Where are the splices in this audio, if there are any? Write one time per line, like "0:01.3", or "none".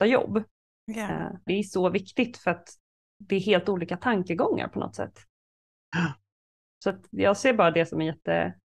0:01.5